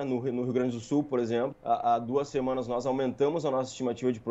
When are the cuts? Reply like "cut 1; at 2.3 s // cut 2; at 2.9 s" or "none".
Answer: cut 1; at 1.5 s